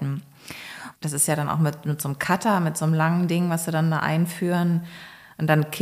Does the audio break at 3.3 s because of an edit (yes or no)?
no